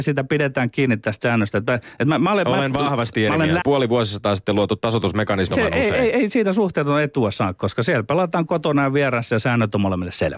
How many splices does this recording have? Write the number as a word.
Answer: two